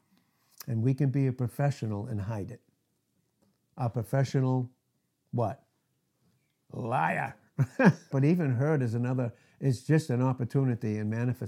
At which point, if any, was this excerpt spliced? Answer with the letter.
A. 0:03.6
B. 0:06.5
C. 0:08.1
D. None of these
C